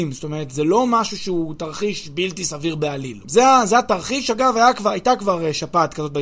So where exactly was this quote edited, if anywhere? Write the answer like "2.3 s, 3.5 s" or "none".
3.2 s